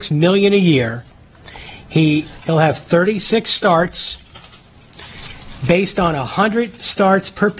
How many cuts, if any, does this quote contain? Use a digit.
1